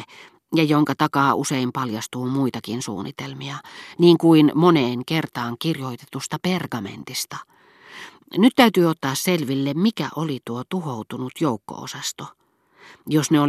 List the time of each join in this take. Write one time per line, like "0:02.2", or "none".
0:08.2